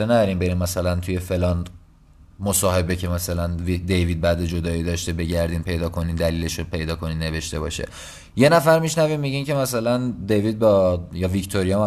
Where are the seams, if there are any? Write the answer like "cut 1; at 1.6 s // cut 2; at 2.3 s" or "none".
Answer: none